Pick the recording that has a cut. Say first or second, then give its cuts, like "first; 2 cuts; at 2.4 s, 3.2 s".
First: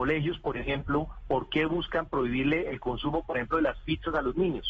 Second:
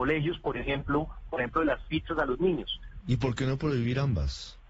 second; 2 cuts; at 1.3 s, 3.0 s